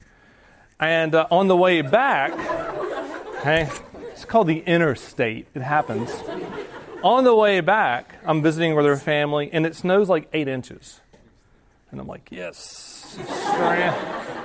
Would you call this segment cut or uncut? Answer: uncut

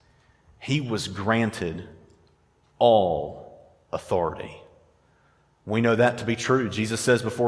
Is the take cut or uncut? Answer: uncut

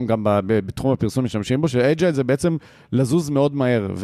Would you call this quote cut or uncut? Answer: uncut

